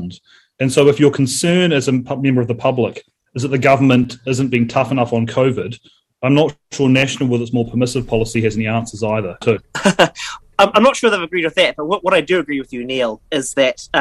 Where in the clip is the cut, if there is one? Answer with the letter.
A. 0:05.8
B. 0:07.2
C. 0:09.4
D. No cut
C